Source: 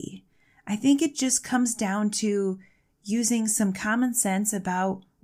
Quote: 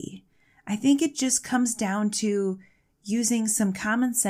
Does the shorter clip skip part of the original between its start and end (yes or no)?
no